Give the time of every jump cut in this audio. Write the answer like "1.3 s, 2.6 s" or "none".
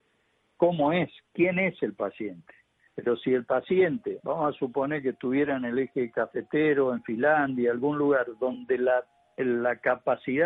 2.9 s, 4.2 s